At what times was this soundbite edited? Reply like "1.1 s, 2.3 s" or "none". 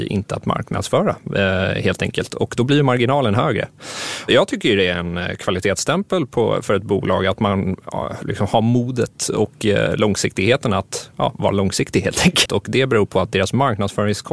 12.5 s